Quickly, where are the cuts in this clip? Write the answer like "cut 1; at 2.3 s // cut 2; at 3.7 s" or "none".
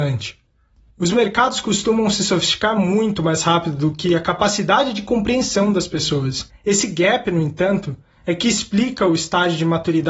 cut 1; at 6.5 s